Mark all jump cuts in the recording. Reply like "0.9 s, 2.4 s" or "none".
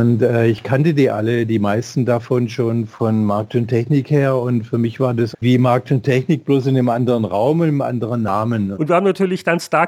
5.3 s, 8.7 s